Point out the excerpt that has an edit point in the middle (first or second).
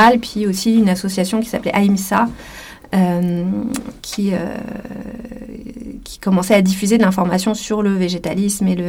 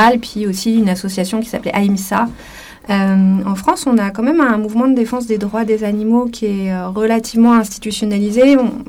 second